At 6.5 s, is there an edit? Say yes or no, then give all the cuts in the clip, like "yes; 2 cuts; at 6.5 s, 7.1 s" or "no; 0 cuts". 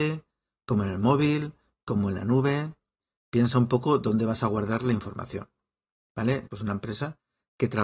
yes; 1 cut; at 6.5 s